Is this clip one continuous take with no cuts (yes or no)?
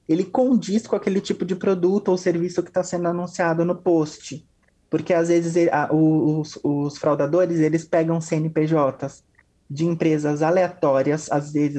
yes